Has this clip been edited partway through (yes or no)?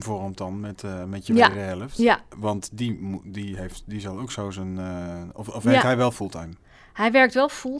no